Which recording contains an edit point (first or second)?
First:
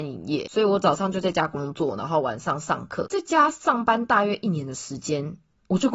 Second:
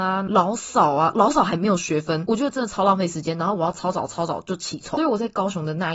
second